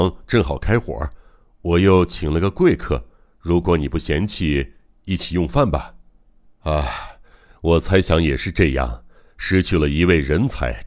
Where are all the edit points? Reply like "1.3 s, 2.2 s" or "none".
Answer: 6.5 s